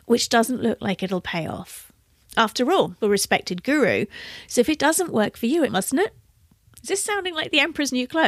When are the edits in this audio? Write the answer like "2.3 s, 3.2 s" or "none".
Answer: 3.0 s, 5.7 s